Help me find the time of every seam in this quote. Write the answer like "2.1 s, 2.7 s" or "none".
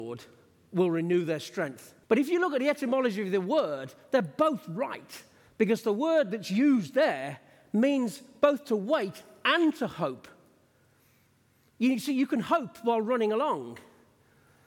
2.0 s

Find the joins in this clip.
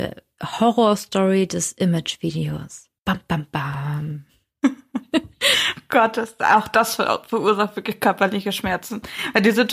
3.0 s

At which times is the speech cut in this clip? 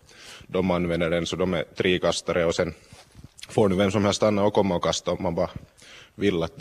none

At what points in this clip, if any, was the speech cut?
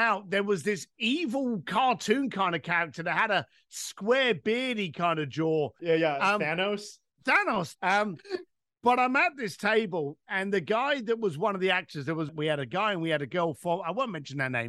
5.8 s, 7.7 s

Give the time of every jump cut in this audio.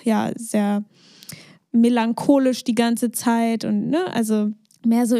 none

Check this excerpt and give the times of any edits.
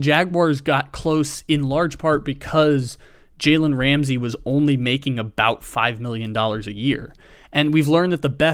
none

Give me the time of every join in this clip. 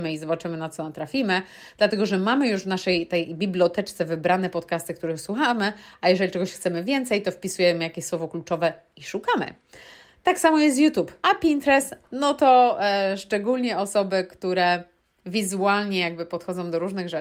11.2 s

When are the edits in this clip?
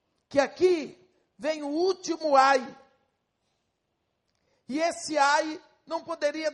none

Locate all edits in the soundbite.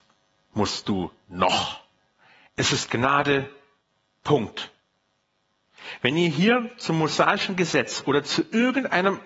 2.5 s

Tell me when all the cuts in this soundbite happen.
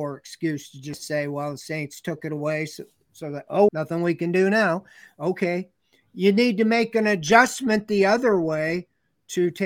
3.7 s

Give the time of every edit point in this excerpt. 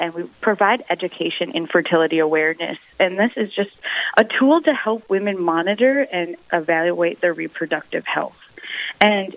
none

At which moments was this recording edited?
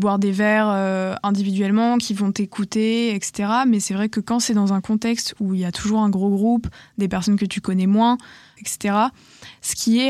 8.6 s

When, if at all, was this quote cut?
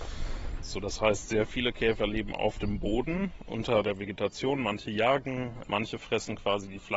5.6 s

